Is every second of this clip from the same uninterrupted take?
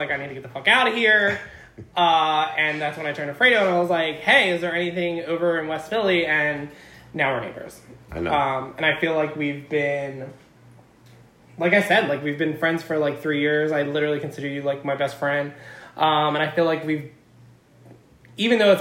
yes; 0 cuts

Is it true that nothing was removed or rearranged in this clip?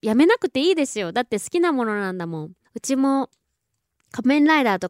no; 1 cut; at 2.6 s

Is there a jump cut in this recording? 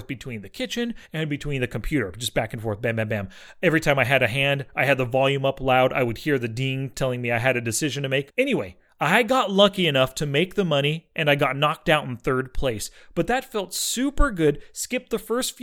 yes; 1 cut; at 8.3 s

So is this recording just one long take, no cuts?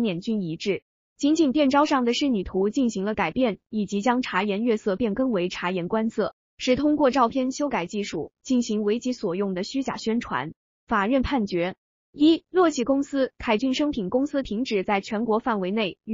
yes; 0 cuts

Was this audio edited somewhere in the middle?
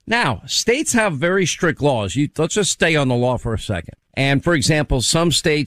yes; 1 cut; at 4.0 s

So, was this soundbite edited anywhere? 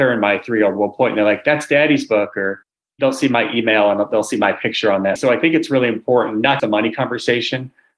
yes; 2 cuts; at 5.2 s, 6.6 s

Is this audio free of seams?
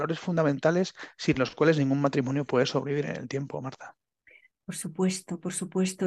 yes; 0 cuts

